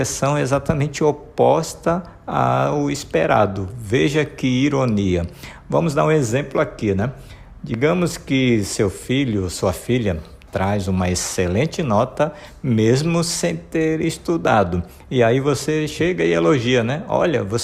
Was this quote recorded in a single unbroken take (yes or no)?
yes